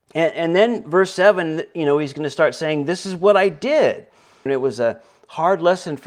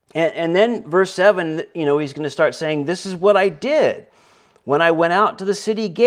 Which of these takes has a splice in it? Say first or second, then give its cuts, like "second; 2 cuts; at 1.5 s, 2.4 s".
first; 1 cut; at 4.5 s